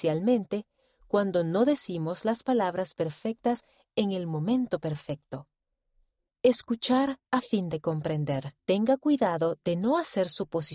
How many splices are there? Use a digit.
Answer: 2